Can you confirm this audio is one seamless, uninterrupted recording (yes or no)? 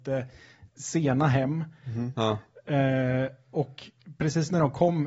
no